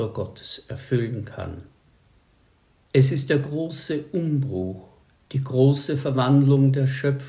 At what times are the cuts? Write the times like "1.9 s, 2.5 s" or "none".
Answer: none